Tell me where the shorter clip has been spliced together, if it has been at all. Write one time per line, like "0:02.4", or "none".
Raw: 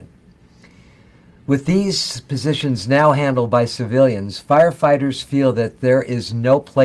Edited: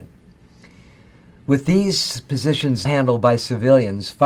0:02.8